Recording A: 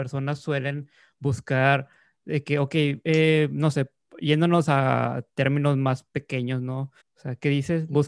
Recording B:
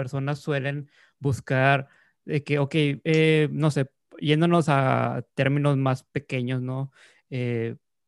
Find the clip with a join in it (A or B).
A